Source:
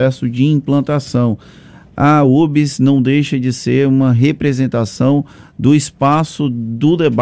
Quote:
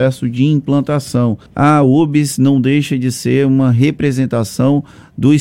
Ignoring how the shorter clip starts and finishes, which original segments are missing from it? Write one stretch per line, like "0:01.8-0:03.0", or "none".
0:01.5-0:01.9